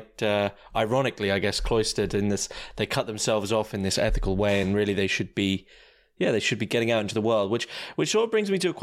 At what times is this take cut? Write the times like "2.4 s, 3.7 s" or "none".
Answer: none